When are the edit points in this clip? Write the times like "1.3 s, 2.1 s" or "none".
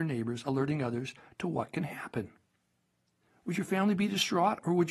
3.3 s